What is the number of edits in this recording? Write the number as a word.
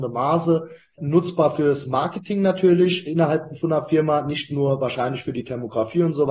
one